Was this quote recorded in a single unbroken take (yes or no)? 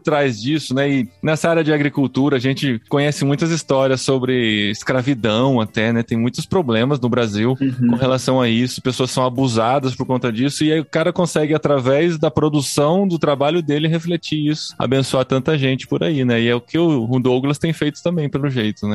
yes